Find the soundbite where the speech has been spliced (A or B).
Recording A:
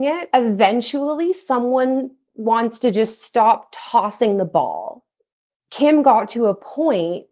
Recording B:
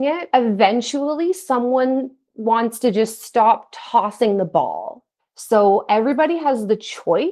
B